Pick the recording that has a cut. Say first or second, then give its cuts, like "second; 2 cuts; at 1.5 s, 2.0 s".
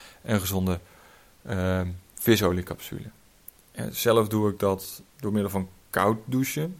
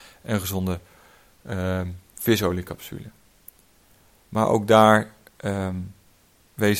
first; 2 cuts; at 3.6 s, 5.2 s